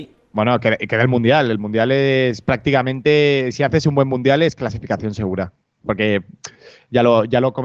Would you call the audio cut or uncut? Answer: uncut